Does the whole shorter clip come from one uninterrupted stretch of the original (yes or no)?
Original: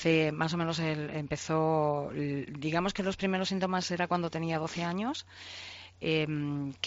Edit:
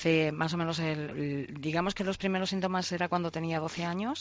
no